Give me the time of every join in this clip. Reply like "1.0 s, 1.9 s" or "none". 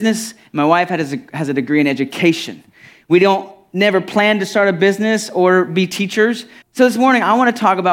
6.6 s